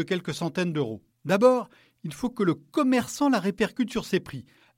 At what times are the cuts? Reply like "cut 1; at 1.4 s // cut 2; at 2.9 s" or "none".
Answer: cut 1; at 1.1 s

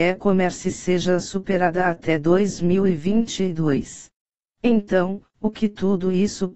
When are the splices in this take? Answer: cut 1; at 4.5 s

